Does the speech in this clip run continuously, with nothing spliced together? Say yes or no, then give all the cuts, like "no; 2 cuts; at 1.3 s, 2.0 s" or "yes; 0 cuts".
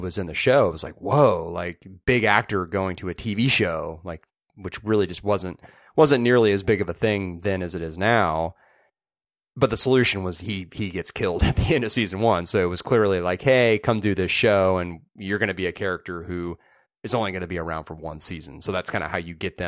yes; 0 cuts